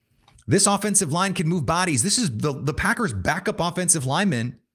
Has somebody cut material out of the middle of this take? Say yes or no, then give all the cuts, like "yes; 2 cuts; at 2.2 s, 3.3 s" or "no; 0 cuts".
no; 0 cuts